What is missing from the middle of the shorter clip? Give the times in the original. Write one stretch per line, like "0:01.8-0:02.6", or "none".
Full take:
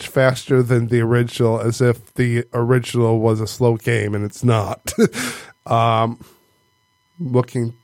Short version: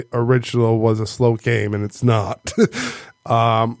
none